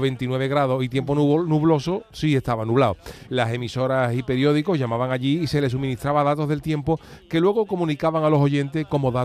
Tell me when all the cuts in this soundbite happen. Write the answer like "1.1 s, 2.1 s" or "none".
3.2 s